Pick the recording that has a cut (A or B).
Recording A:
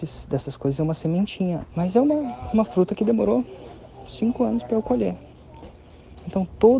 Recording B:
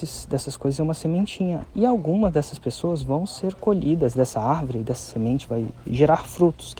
A